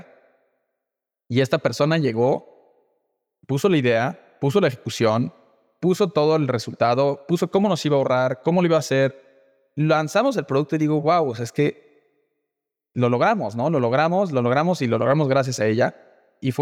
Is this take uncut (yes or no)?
yes